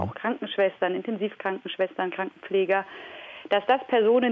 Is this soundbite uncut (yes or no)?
yes